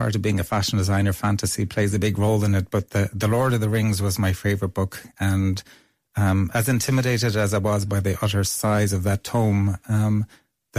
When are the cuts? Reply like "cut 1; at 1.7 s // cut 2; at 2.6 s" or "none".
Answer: none